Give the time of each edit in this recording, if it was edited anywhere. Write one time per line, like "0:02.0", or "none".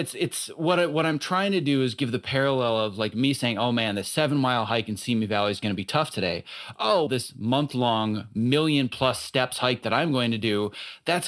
0:07.1